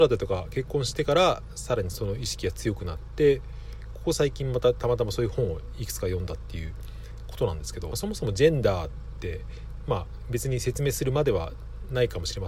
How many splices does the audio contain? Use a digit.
1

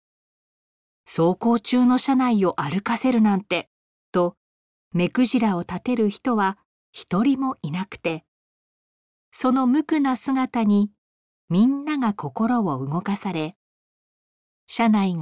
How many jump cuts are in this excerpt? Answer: 0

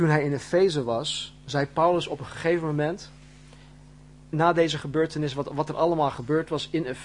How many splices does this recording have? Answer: 1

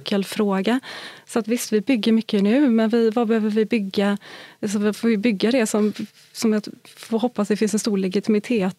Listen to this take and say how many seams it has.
0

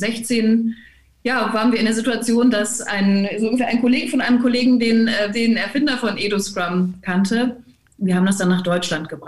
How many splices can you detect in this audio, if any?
1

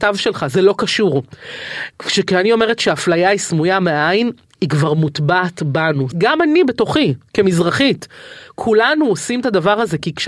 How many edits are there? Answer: 1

